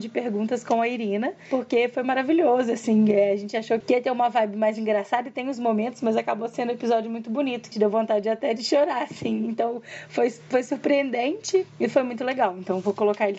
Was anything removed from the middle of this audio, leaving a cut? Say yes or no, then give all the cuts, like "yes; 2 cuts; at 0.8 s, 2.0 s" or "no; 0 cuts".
yes; 2 cuts; at 3.8 s, 7.7 s